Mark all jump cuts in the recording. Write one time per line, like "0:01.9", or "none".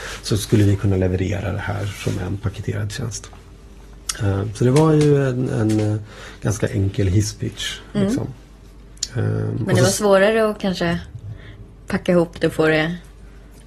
none